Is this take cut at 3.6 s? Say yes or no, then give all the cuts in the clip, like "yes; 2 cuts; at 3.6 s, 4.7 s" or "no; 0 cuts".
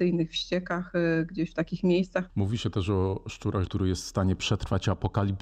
yes; 2 cuts; at 2.3 s, 3.6 s